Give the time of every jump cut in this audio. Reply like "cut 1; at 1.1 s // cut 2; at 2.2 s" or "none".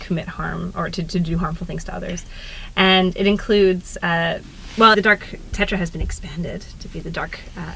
cut 1; at 4.9 s